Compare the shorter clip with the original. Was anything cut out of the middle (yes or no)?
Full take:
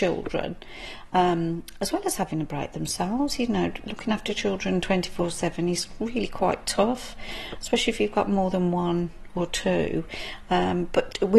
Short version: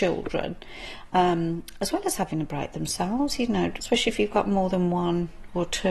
yes